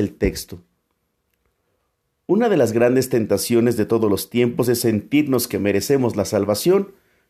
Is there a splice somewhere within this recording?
no; 0 cuts

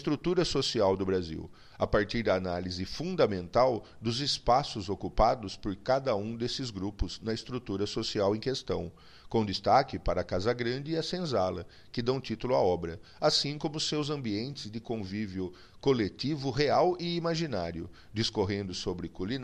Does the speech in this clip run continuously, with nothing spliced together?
yes; 0 cuts

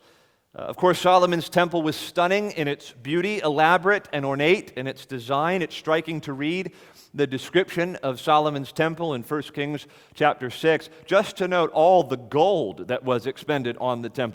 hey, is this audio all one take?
yes; 0 cuts

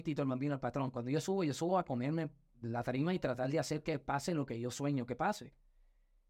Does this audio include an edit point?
no; 0 cuts

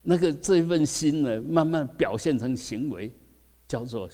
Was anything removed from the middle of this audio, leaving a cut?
no; 0 cuts

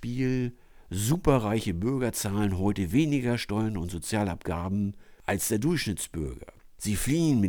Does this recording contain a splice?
yes; 1 cut; at 5.2 s

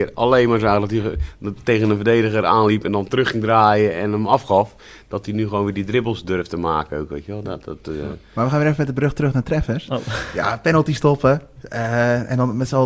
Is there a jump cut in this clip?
no; 0 cuts

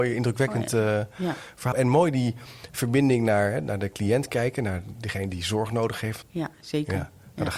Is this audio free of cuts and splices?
no; 2 cuts; at 1.7 s, 6.2 s

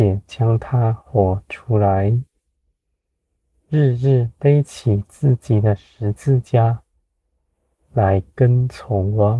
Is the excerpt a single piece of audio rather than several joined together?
yes; 0 cuts

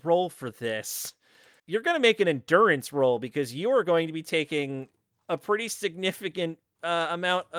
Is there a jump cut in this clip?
yes; 1 cut; at 1.6 s

